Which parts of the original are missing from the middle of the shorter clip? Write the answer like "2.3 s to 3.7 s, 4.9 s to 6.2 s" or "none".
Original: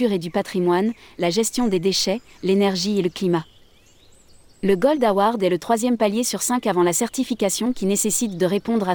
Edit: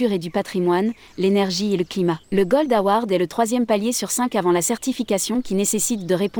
1.1 s to 2.3 s, 3.5 s to 4.5 s